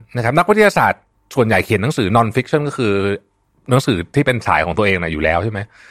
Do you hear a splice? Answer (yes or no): no